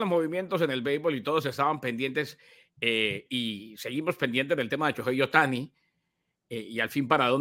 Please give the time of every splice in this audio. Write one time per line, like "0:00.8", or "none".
0:03.3